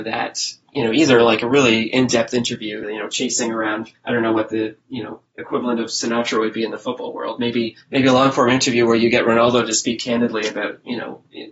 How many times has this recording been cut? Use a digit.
1